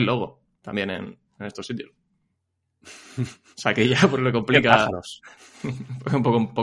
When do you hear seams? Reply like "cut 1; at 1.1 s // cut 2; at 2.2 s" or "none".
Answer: none